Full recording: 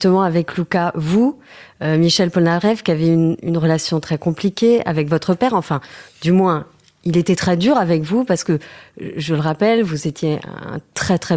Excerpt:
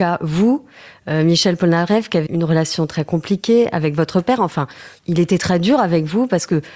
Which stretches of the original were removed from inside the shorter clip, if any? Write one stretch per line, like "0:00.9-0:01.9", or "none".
0:03.0-0:03.4
0:06.1-0:07.0